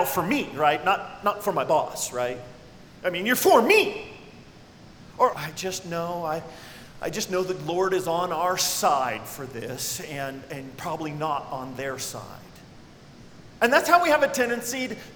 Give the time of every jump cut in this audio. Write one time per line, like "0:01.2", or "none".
0:05.3